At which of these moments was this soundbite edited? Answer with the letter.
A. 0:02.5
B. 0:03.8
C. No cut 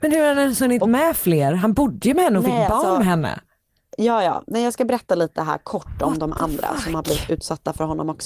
C